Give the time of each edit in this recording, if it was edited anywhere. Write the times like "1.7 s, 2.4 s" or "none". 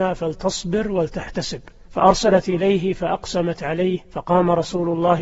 4.0 s